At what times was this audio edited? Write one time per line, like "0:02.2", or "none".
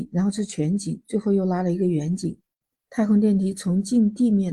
none